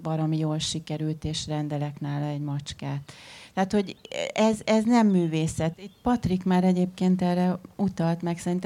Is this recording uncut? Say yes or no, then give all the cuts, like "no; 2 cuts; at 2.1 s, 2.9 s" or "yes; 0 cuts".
no; 1 cut; at 5.7 s